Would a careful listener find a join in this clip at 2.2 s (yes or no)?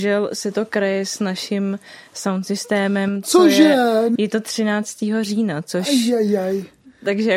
no